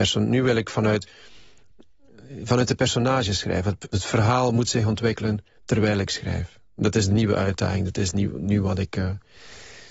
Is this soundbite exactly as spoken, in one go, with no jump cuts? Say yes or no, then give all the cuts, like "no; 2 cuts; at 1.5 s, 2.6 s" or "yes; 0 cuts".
yes; 0 cuts